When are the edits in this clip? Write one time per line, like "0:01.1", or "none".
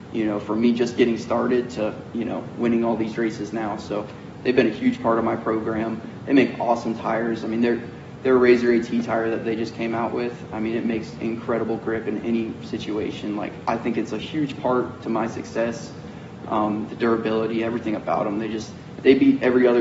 none